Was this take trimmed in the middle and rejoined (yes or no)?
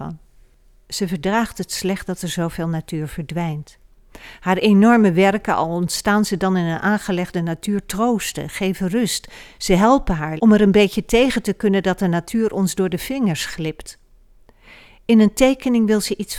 yes